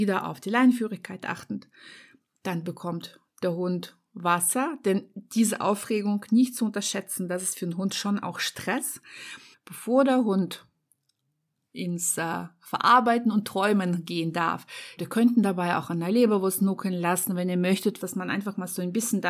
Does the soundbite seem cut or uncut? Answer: cut